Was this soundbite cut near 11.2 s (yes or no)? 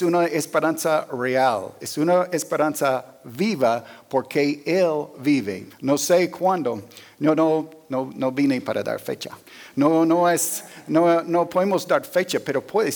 no